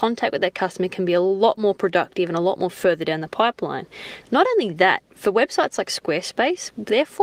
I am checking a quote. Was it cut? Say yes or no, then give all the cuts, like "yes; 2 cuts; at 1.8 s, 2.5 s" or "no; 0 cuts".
yes; 1 cut; at 4.2 s